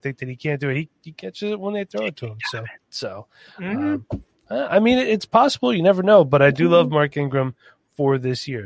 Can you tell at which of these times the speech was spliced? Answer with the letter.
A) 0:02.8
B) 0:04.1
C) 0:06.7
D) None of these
A